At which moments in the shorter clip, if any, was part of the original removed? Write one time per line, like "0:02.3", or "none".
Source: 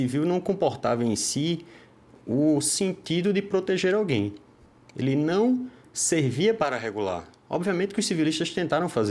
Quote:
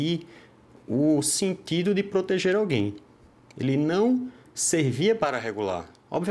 none